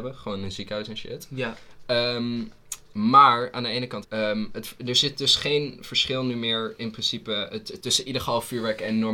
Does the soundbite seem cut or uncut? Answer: cut